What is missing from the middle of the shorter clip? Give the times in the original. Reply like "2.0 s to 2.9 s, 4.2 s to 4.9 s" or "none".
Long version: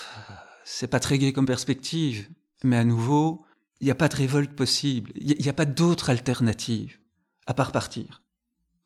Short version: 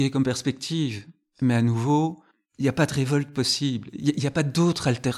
none